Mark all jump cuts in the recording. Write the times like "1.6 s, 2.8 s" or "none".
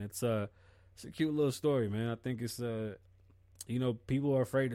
none